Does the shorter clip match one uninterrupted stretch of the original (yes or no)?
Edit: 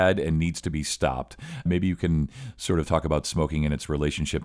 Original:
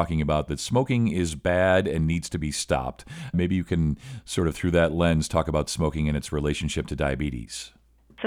no